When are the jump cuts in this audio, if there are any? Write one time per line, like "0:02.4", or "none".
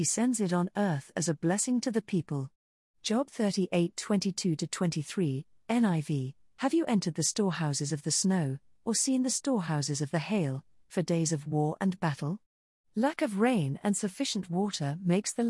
0:10.8